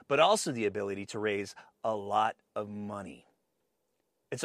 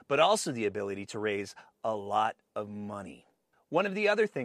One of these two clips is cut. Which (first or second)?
second